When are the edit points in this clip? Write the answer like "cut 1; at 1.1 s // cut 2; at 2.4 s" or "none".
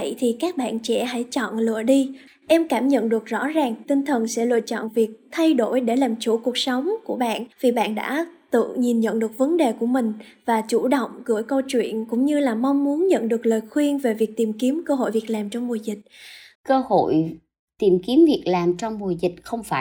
cut 1; at 2.3 s // cut 2; at 7.5 s // cut 3; at 16.5 s